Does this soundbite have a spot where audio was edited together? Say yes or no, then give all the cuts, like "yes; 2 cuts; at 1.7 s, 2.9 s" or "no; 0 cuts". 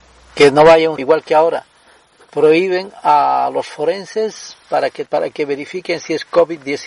yes; 2 cuts; at 1.0 s, 5.1 s